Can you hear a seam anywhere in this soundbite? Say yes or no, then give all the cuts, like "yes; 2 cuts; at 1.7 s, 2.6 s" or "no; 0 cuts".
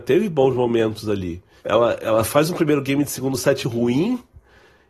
yes; 2 cuts; at 1.6 s, 3.6 s